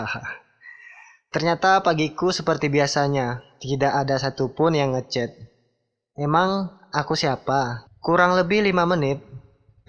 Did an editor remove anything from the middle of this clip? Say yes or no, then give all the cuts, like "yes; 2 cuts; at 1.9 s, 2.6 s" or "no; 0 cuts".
yes; 1 cut; at 7.9 s